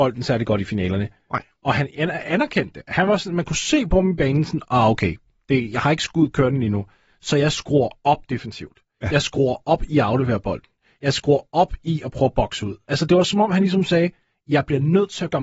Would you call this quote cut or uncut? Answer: uncut